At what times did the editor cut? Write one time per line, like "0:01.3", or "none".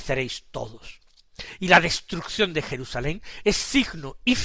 none